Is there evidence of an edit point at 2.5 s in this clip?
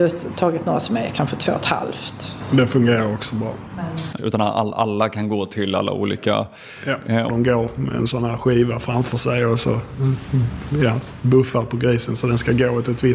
no; 2 cuts; at 4.2 s, 7.3 s

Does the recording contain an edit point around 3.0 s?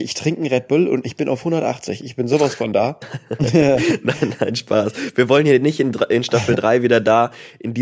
yes; 1 cut; at 3.0 s

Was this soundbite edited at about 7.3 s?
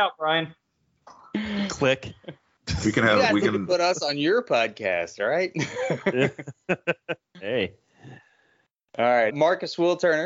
no; 1 cut; at 9.3 s

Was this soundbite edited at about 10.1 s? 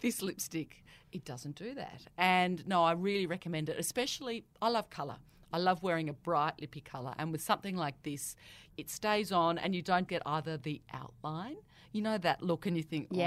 yes; 1 cut; at 10.1 s

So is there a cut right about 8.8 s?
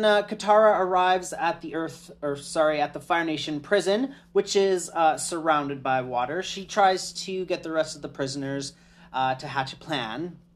no; 0 cuts

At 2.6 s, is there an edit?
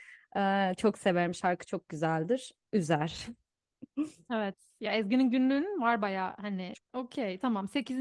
yes; 2 cuts; at 2.6 s, 6.7 s

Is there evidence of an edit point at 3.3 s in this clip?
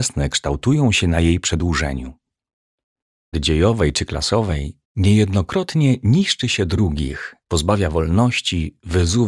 yes; 3 cuts; at 3.3 s, 4.8 s, 7.4 s

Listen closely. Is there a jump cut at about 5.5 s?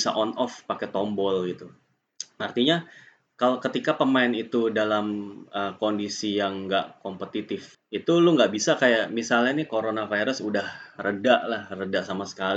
no; 1 cut; at 7.7 s

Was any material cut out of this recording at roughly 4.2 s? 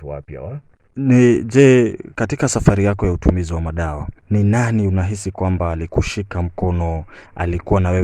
yes; 2 cuts; at 0.9 s, 4.2 s

